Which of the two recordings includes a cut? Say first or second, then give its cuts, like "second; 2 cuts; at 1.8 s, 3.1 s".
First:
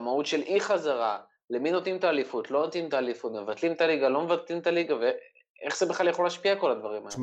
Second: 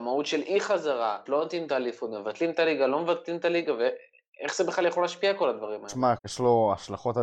second; 2 cuts; at 1.3 s, 6.2 s